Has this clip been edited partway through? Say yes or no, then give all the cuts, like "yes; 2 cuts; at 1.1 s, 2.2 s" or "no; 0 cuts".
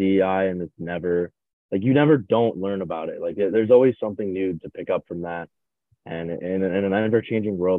no; 0 cuts